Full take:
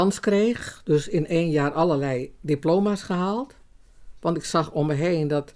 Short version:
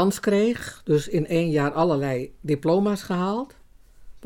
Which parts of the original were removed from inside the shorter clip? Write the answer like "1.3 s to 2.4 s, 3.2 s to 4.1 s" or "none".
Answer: none